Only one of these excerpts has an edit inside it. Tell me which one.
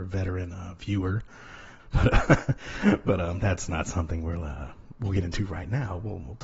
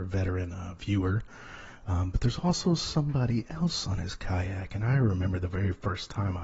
first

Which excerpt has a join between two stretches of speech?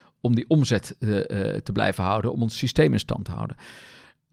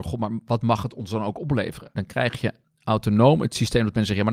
second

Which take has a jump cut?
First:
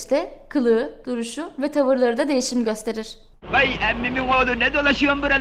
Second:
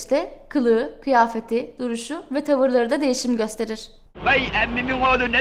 first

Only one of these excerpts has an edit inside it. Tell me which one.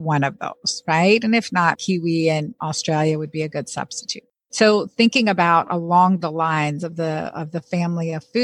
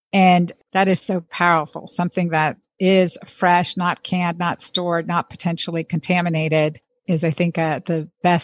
first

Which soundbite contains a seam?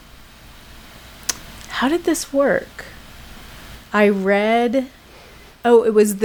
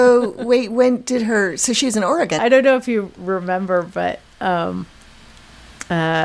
second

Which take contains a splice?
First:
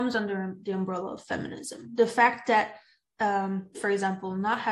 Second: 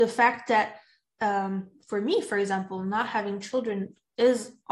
first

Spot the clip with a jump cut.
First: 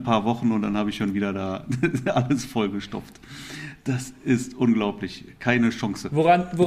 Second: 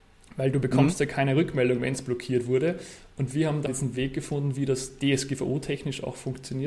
second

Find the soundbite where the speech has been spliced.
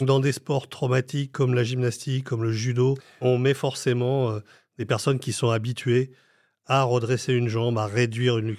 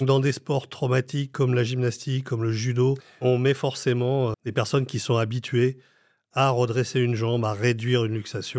second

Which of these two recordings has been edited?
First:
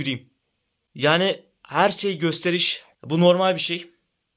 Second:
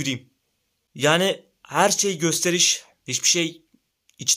first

